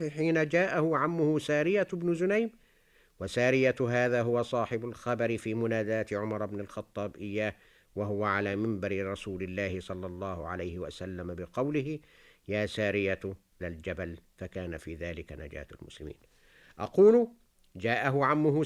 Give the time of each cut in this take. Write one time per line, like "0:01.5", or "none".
0:13.6